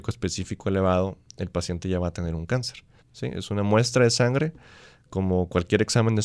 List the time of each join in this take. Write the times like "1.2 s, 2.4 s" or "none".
3.0 s

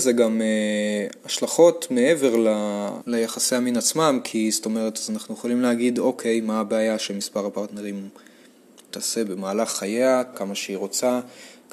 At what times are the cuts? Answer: 3.0 s, 8.9 s, 10.3 s

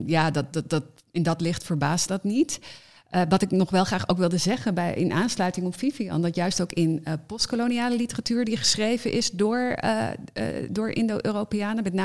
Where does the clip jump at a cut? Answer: none

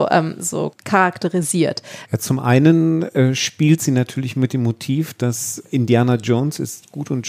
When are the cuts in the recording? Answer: 2.1 s

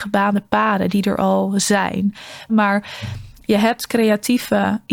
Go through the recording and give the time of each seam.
2.5 s

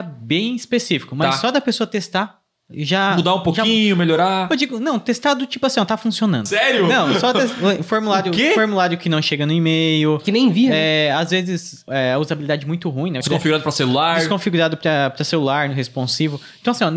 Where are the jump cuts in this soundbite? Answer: 13.2 s

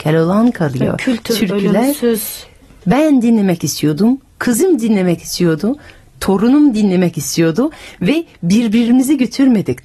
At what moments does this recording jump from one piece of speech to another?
2.8 s

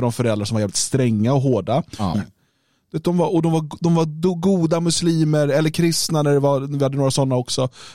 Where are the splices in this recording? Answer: 2.1 s

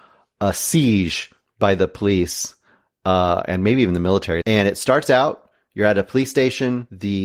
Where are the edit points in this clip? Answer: 4.4 s

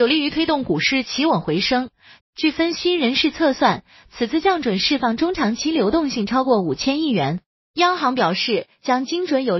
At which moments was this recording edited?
2.2 s

